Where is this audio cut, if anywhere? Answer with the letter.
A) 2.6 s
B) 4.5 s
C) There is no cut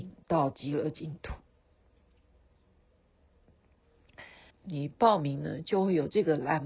B